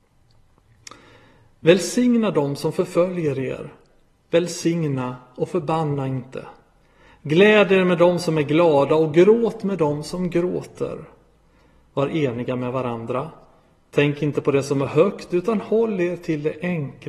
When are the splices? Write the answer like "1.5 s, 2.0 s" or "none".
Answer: none